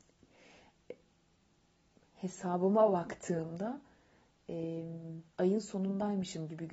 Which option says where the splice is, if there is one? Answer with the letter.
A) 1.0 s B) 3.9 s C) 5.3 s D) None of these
C